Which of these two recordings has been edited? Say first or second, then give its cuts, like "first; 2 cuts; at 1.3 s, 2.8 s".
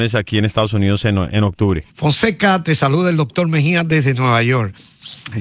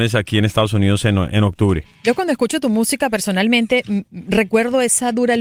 first; 1 cut; at 1.9 s